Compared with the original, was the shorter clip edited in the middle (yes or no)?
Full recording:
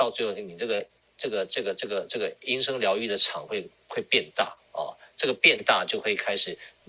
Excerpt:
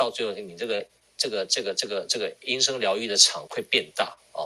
yes